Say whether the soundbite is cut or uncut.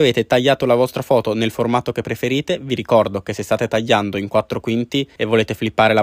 uncut